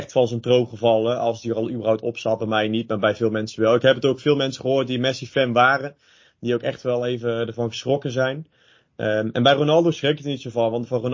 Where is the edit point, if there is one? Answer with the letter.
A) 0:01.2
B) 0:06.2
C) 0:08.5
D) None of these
D